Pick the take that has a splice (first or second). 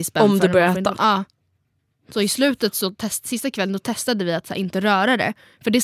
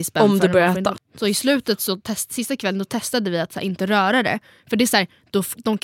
second